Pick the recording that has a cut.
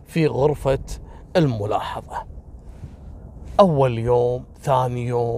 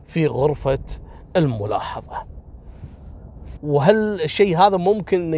second; 1 cut; at 3.6 s

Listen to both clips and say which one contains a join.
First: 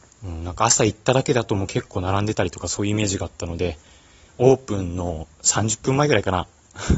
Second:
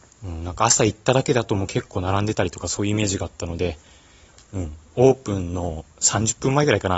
first; 1 cut; at 4.3 s

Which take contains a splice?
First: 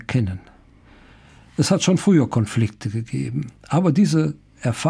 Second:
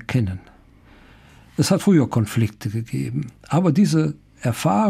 second; 1 cut; at 1.8 s

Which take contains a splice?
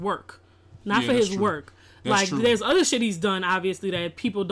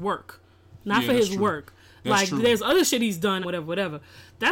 second; 1 cut; at 3.4 s

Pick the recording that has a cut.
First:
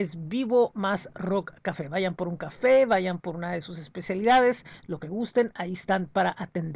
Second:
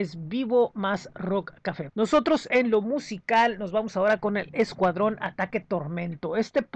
second; 1 cut; at 1.9 s

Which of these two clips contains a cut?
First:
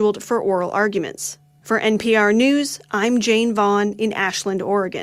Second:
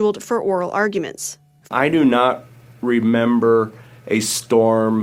second; 1 cut; at 1.7 s

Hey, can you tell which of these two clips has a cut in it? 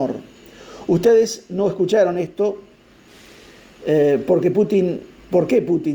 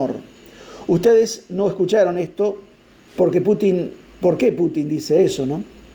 second; 1 cut; at 3.2 s

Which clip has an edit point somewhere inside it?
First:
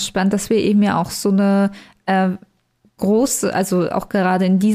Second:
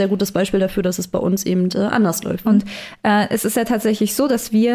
second; 1 cut; at 2.4 s

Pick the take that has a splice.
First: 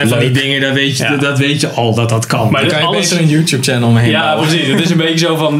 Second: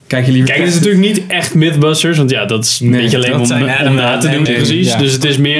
second; 1 cut; at 4.5 s

